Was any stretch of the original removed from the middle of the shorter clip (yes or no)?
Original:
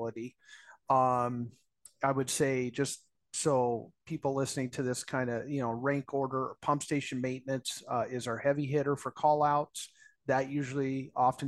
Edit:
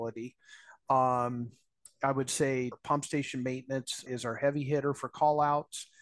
yes